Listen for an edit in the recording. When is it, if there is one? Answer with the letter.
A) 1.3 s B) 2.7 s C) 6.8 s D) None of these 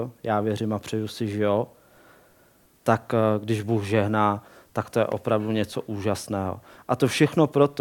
C